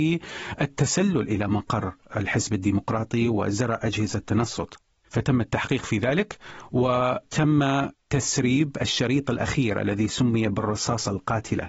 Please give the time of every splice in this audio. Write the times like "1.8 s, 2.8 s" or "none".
4.9 s